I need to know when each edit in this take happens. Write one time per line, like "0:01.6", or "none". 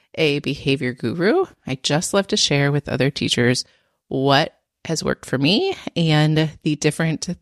none